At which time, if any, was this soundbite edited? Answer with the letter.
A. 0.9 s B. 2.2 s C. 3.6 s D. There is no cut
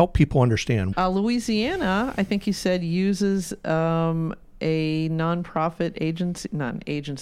A